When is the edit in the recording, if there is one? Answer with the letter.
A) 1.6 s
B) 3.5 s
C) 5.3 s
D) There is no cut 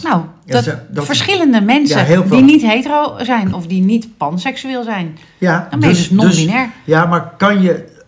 B